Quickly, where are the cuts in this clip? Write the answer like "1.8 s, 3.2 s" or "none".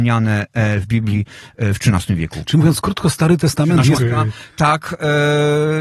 4.0 s